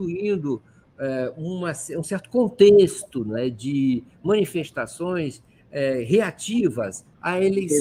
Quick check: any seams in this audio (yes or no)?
no